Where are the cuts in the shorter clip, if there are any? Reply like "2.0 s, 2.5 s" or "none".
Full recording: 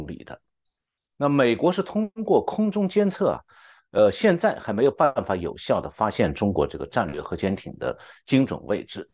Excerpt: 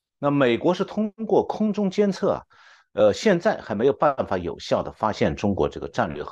none